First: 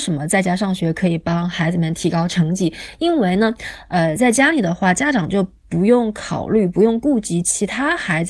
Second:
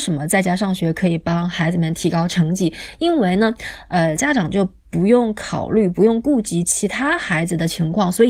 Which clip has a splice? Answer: second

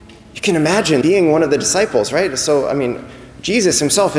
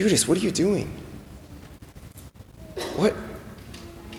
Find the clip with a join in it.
first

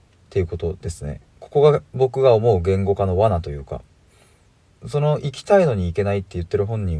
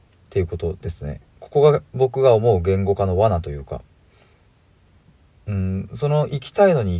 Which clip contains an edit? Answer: first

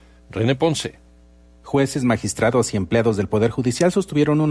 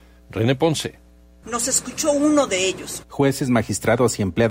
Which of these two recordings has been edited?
second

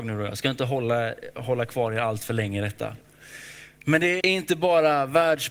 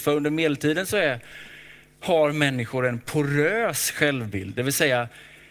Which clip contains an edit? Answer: first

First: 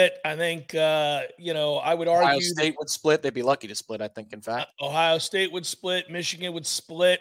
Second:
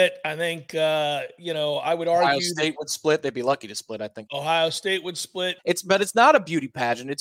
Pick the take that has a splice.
second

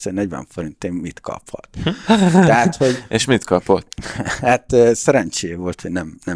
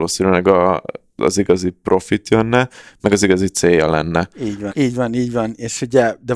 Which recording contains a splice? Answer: second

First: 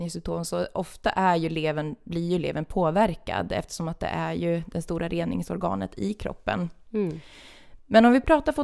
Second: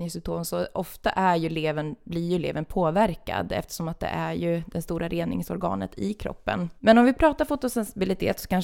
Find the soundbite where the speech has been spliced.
second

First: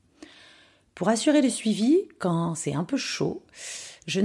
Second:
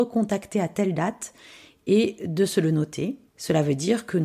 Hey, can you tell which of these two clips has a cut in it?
second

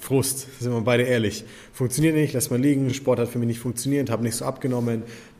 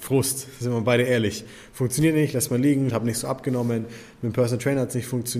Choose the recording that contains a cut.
second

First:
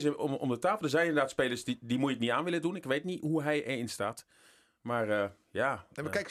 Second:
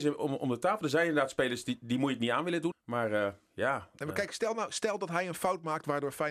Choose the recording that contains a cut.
second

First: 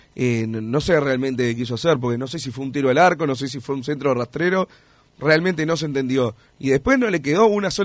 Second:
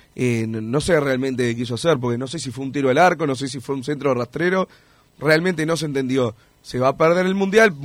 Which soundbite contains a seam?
second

